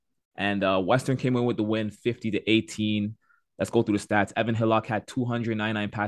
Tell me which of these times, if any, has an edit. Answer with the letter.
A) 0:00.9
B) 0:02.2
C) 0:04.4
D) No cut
D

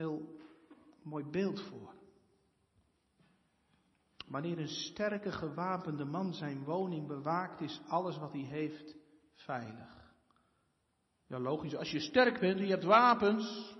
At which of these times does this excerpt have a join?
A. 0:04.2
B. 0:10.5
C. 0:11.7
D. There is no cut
D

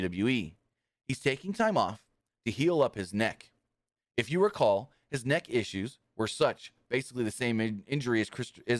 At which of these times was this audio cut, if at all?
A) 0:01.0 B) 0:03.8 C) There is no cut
C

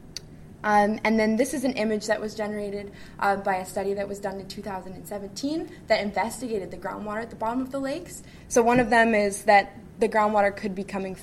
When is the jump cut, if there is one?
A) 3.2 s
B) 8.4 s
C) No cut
B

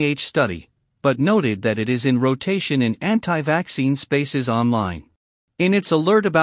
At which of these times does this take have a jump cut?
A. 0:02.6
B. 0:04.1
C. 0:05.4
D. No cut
C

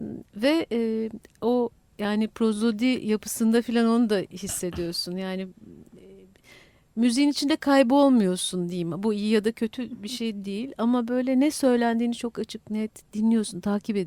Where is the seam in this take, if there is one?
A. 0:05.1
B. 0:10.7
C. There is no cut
C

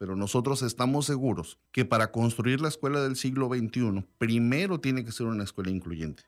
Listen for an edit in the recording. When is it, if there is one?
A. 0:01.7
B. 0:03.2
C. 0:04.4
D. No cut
A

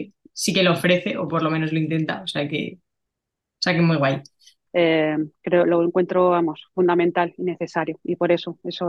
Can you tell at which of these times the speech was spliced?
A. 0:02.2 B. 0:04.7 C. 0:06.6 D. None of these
B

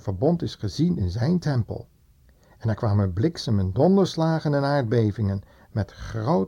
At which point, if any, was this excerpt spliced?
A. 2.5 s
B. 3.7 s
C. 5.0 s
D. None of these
B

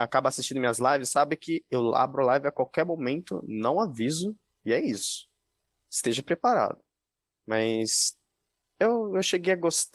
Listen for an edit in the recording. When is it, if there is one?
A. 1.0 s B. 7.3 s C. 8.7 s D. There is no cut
D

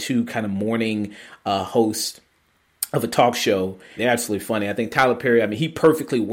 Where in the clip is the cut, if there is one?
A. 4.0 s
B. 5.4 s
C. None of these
A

